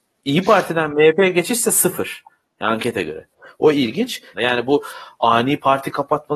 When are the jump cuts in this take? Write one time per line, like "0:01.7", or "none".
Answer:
0:02.4
0:04.3

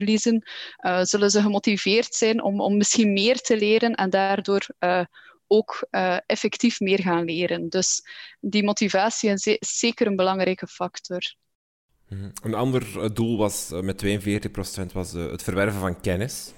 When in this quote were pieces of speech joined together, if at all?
none

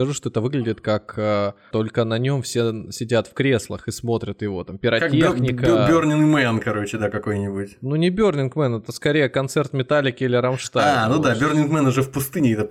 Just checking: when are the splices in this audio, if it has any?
0:01.7

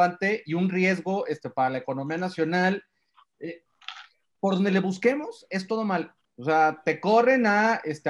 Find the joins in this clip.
0:06.2

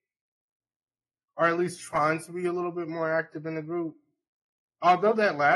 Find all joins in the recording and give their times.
none

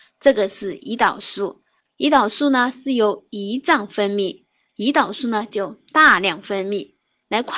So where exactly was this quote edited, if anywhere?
0:04.7

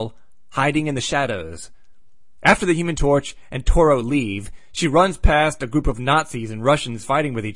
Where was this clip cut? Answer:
none

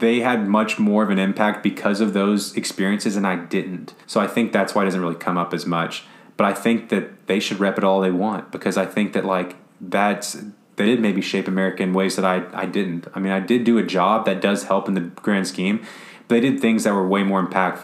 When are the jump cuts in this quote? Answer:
0:04.0
0:10.8

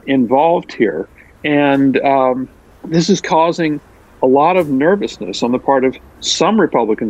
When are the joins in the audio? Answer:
none

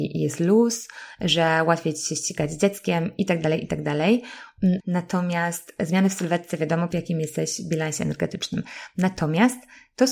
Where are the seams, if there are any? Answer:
0:04.8
0:06.9

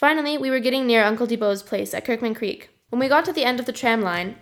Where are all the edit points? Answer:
0:02.9

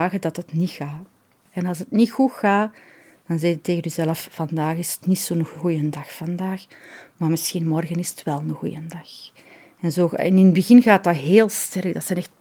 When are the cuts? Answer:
none

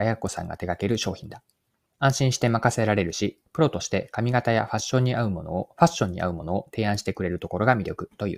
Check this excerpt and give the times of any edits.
0:01.9

